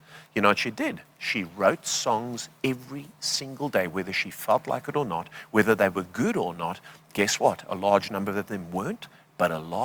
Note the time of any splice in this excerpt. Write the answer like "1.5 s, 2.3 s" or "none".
none